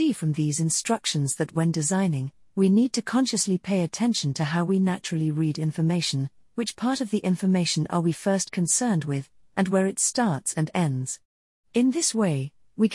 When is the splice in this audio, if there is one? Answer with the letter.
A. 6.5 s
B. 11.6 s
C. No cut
C